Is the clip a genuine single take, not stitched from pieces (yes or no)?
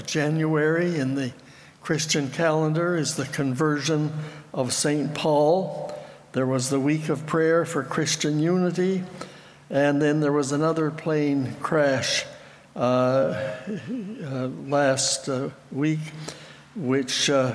yes